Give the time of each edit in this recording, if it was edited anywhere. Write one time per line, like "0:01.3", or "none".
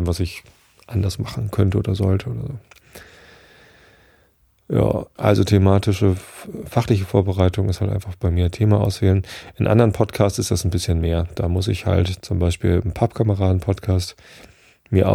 0:05.2